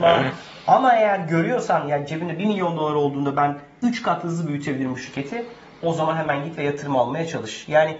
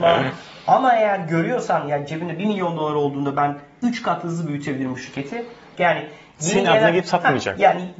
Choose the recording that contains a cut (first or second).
second